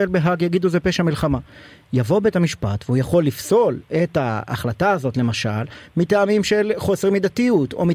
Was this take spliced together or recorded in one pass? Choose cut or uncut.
uncut